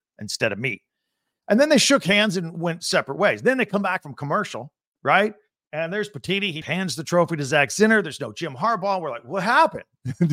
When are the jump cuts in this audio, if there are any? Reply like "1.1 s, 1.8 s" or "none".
6.6 s